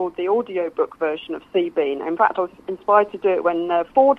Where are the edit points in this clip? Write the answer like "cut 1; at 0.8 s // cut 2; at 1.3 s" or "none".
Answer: none